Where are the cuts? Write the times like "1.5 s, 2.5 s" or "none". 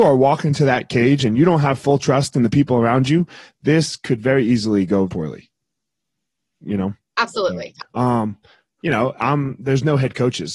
5.1 s, 7.8 s